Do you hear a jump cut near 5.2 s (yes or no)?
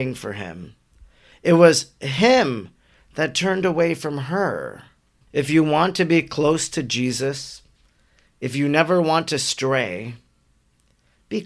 yes